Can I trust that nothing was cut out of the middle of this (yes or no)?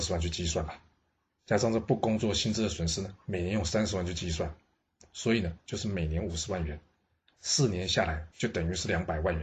no